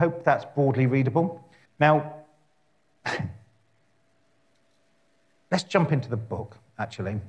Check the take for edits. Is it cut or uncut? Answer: cut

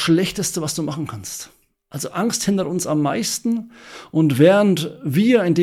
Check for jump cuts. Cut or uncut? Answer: uncut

